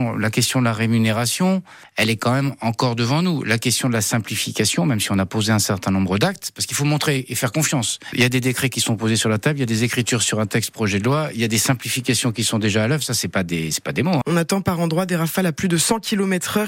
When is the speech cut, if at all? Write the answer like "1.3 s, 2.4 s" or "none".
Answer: 14.2 s

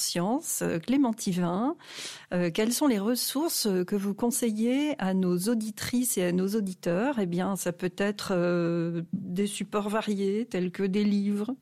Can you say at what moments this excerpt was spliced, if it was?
none

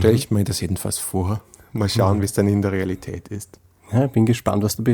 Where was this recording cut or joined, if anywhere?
none

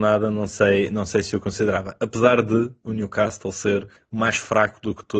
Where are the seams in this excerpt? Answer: none

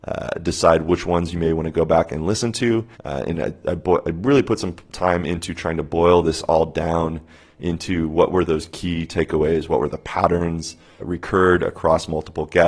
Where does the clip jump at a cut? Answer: 2.9 s, 11.0 s

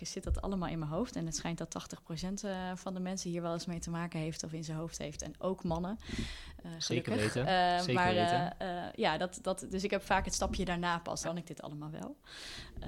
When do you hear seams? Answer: 11.2 s

